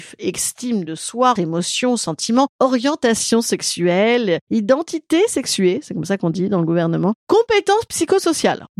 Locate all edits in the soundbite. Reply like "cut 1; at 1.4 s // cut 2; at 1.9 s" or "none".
cut 1; at 1.3 s